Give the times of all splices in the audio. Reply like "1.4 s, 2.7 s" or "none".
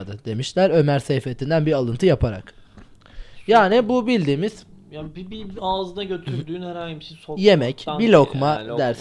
none

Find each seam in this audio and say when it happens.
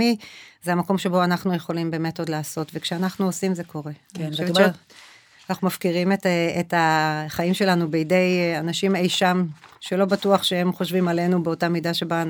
none

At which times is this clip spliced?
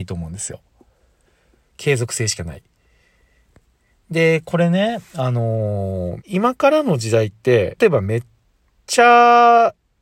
6.2 s, 7.8 s

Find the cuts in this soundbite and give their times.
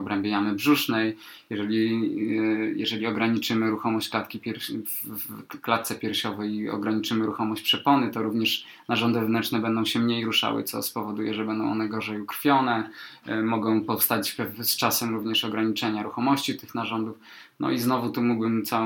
none

